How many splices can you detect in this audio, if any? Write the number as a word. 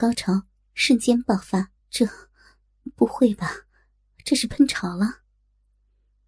one